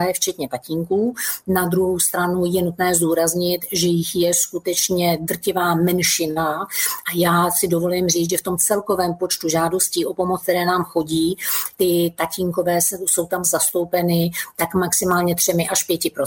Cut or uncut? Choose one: uncut